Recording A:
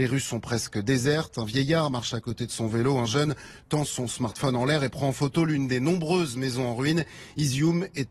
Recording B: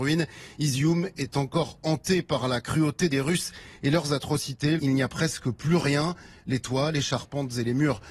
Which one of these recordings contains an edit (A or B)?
B